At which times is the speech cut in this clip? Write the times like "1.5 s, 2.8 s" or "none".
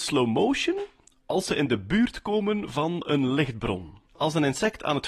4.1 s